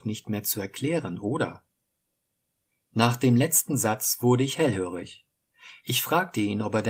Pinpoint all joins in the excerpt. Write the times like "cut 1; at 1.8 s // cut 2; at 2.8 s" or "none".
cut 1; at 2.9 s